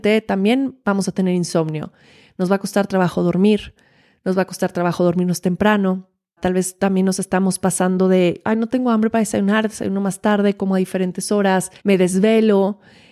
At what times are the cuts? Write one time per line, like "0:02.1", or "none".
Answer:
0:06.4
0:11.8